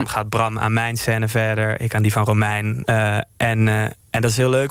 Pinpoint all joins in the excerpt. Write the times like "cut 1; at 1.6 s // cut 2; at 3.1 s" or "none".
cut 1; at 2.8 s